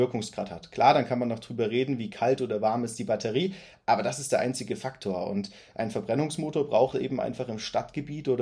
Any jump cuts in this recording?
no; 0 cuts

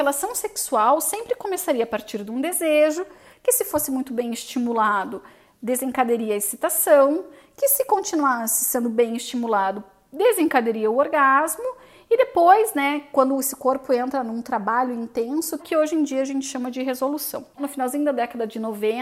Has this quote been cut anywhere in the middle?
yes; 2 cuts; at 15.6 s, 17.5 s

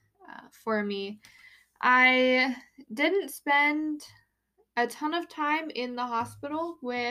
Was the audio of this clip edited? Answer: no; 0 cuts

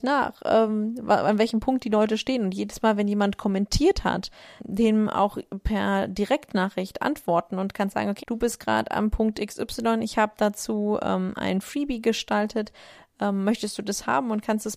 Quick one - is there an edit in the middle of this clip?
yes; 2 cuts; at 4.6 s, 8.2 s

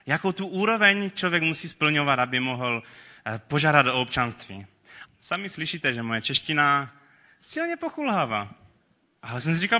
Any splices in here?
yes; 1 cut; at 5.1 s

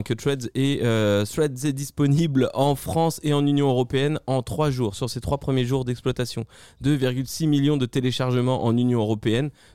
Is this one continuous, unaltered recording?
yes; 0 cuts

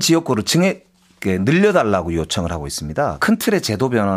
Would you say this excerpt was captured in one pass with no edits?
no; 1 cut; at 3.2 s

